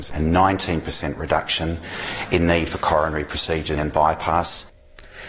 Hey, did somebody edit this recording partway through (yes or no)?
yes